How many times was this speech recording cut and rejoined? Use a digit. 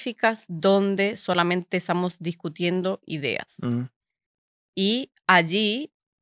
0